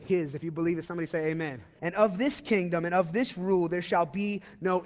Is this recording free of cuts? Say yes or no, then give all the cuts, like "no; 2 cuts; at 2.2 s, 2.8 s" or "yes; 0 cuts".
no; 1 cut; at 1.8 s